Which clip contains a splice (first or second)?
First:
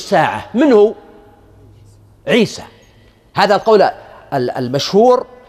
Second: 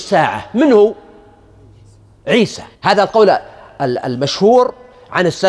second